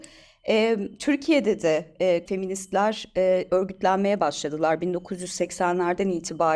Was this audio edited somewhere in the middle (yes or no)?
yes